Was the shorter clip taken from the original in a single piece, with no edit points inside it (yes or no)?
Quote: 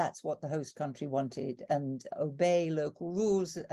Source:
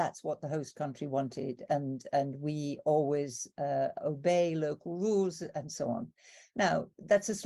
no